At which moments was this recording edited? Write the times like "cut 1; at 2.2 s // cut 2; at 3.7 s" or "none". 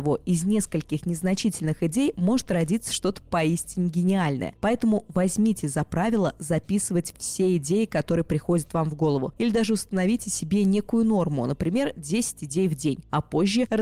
none